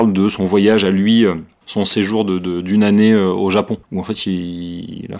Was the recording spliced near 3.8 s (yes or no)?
yes